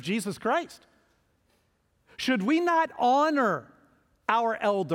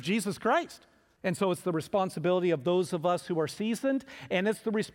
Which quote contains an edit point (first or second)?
second